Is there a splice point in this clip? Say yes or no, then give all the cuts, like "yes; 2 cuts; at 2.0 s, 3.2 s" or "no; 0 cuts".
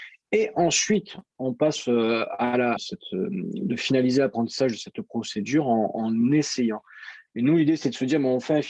yes; 2 cuts; at 2.8 s, 7.3 s